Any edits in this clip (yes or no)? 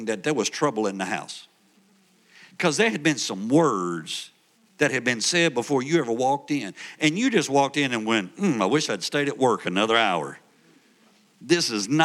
no